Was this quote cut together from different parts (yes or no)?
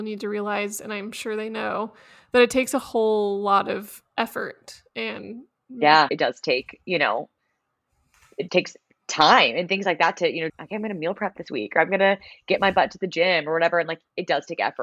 yes